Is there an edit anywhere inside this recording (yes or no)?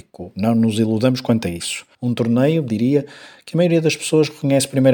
yes